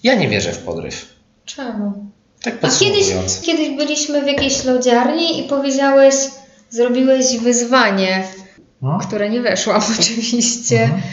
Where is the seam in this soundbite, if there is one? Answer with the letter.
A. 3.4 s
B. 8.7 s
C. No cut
A